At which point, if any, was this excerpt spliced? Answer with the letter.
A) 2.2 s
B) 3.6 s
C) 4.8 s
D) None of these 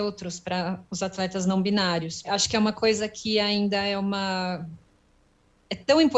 A